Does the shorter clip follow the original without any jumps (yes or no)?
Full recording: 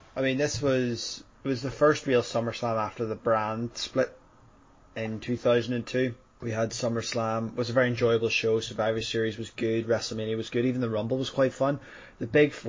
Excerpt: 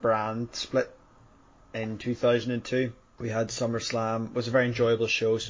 yes